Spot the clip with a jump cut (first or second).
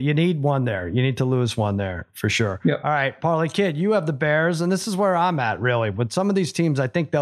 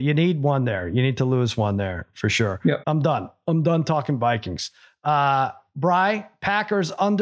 second